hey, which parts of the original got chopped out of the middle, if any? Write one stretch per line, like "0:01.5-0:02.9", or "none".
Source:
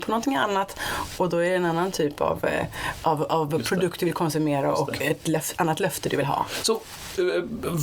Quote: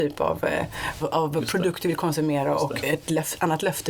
0:03.0-0:03.2